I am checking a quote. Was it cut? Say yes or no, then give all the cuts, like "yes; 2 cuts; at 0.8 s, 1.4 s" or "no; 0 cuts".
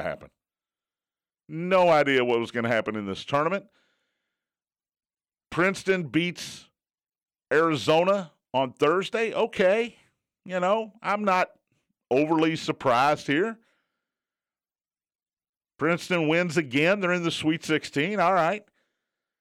no; 0 cuts